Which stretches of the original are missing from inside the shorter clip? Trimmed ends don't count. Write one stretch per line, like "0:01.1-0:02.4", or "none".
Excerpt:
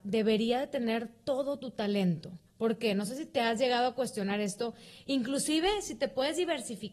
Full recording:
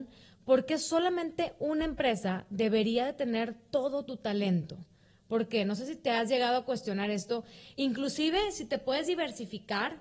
0:04.9-0:05.2